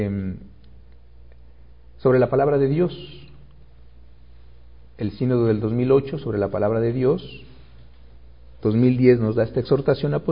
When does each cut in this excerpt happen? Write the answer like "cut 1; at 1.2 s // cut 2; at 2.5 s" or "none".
none